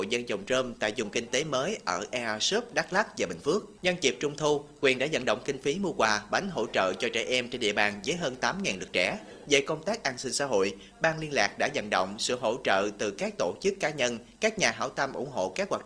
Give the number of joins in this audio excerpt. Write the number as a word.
two